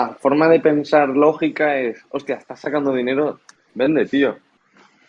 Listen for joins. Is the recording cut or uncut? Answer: uncut